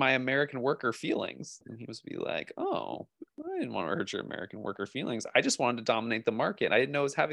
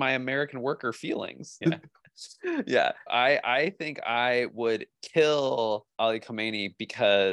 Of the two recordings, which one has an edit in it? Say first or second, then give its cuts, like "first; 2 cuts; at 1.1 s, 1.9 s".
second; 3 cuts; at 1.6 s, 3.1 s, 6.0 s